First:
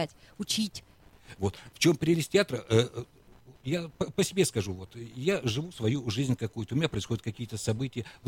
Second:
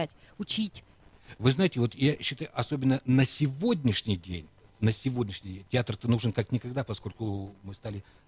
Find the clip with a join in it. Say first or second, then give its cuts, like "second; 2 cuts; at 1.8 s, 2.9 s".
first; 1 cut; at 1.4 s